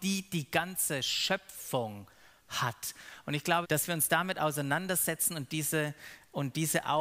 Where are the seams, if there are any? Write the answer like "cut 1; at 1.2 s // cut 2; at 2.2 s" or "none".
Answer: cut 1; at 3.6 s